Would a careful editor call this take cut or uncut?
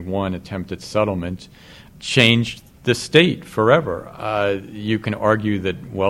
cut